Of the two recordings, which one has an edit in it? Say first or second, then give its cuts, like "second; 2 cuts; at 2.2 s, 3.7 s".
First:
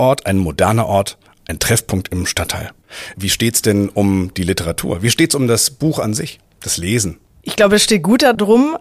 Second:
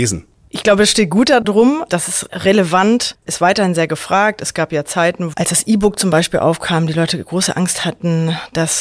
second; 1 cut; at 5.3 s